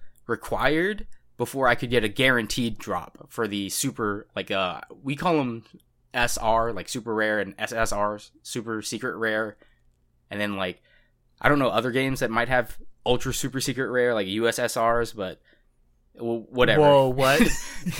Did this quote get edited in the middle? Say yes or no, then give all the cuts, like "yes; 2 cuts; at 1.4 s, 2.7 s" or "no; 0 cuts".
no; 0 cuts